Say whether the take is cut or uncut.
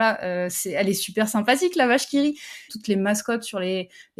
cut